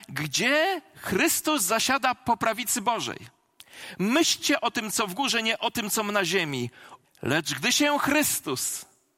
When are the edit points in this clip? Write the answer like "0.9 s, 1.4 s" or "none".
7.0 s